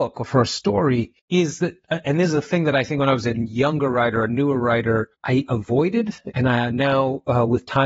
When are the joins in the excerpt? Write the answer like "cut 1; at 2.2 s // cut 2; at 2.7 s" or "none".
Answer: cut 1; at 1.2 s // cut 2; at 5.1 s

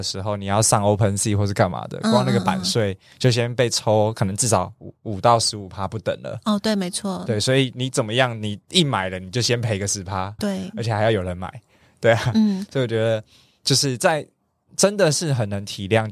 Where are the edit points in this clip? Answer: cut 1; at 10.4 s

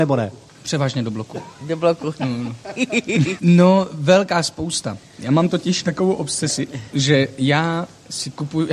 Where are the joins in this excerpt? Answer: cut 1; at 3.4 s // cut 2; at 6.9 s

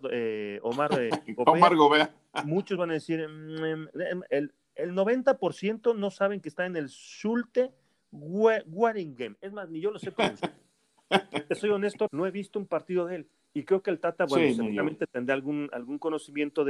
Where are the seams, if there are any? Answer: cut 1; at 12.1 s

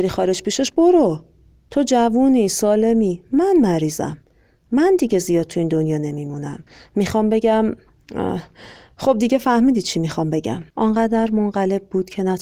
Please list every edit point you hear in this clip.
cut 1; at 10.7 s

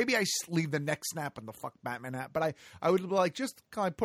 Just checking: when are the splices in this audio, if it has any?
none

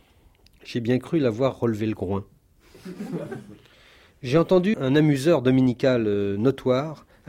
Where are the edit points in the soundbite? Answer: cut 1; at 4.7 s

